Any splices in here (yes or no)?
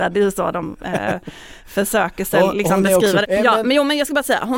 yes